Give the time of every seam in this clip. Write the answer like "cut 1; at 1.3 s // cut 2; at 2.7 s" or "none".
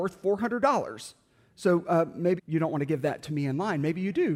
cut 1; at 2.4 s